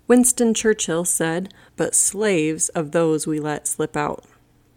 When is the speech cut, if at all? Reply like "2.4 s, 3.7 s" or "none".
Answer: 1.7 s